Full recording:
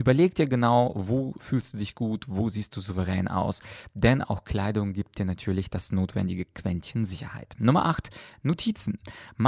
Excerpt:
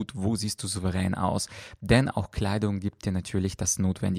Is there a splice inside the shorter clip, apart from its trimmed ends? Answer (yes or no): no